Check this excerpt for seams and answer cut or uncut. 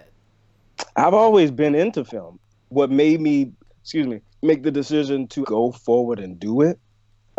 cut